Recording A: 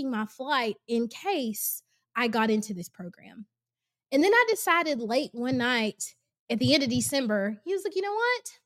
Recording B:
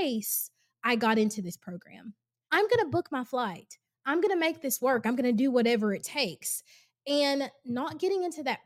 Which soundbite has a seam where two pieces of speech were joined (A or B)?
B